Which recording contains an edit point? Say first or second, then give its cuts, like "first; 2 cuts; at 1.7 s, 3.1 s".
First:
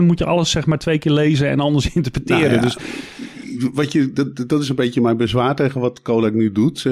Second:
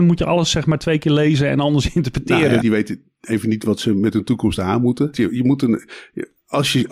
second; 2 cuts; at 2.6 s, 5.1 s